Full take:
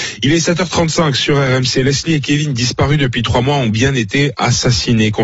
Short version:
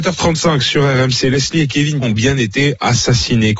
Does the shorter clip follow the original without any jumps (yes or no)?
no